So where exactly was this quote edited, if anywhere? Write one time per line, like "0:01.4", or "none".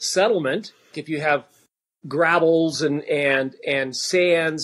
0:00.9